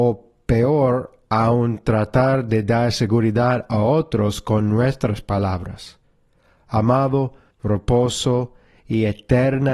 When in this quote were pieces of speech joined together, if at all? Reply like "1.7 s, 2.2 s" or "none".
7.5 s

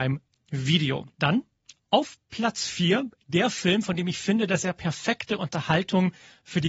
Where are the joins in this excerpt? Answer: 1.1 s

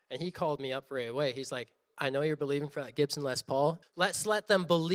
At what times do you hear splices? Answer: 1.9 s, 3.8 s

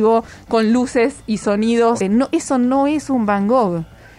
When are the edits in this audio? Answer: 2.0 s

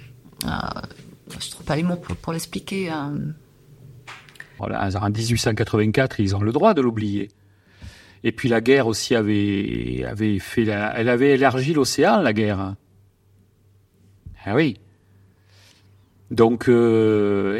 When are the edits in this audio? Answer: 4.6 s

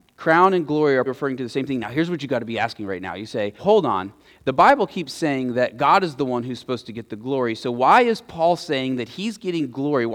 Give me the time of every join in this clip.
1.1 s, 3.6 s

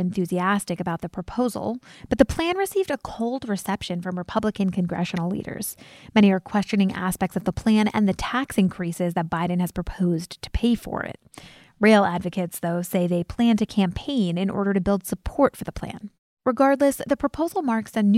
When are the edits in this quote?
2.0 s

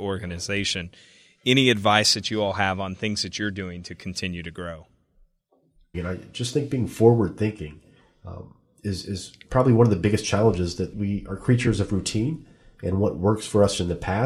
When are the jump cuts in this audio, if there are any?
5.9 s, 10.9 s

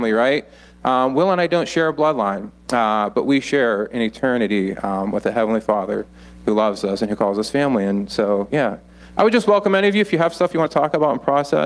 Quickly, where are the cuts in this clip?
none

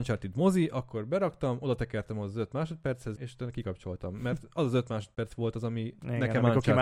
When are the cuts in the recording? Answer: 3.2 s

